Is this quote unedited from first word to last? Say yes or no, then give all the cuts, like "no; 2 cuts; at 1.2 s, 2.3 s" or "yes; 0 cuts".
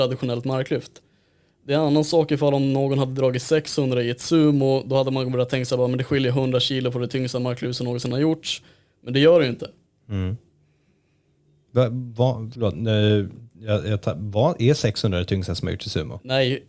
yes; 0 cuts